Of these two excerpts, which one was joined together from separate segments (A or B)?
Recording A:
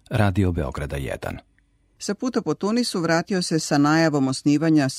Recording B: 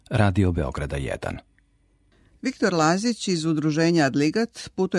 A